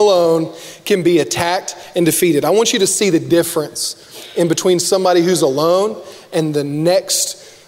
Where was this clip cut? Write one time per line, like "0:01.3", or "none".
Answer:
none